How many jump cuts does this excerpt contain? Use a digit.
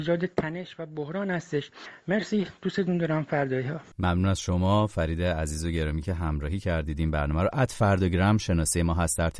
1